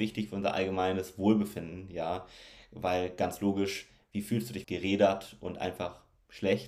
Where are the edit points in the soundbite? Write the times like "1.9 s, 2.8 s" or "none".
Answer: 4.6 s